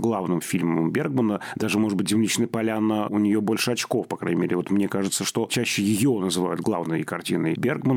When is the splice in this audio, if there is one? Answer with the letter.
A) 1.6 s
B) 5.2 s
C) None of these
C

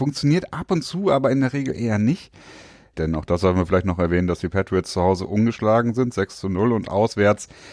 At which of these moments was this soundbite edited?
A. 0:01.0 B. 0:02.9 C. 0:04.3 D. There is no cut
B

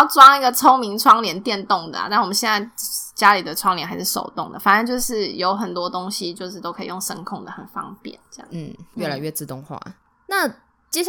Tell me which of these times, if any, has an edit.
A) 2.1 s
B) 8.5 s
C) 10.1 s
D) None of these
D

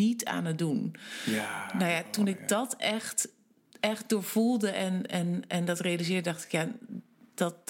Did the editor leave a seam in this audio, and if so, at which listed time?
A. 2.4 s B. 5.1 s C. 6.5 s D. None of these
D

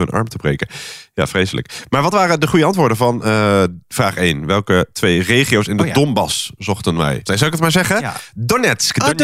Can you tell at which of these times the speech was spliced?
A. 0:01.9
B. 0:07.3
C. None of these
B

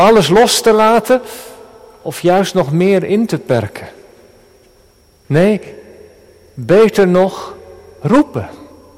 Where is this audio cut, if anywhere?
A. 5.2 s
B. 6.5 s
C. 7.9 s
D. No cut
A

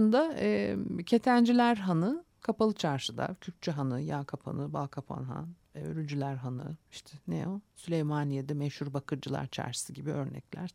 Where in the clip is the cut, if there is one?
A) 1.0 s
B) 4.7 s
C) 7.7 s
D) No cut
D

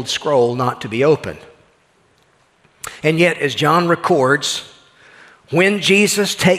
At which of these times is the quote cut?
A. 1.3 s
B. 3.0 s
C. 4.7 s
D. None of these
D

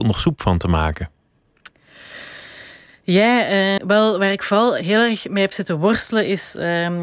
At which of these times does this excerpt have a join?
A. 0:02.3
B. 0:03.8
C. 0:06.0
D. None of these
B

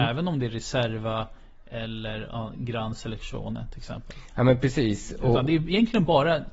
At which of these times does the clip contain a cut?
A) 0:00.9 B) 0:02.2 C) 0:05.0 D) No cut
D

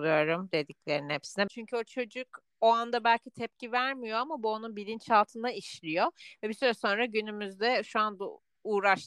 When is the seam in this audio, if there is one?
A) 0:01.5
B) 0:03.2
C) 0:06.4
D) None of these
A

